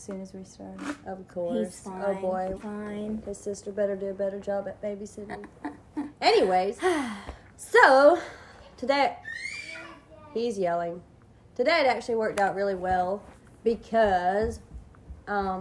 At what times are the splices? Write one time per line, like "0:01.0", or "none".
0:02.6